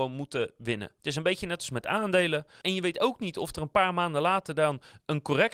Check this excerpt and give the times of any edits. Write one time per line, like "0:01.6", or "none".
0:01.0
0:02.6